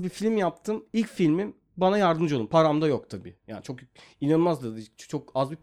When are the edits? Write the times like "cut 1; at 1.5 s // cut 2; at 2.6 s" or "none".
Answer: none